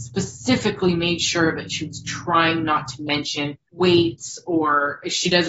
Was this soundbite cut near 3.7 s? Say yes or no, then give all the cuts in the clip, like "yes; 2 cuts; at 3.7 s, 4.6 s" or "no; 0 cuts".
yes; 1 cut; at 3.7 s